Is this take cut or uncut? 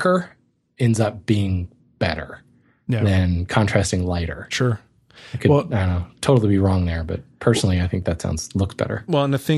uncut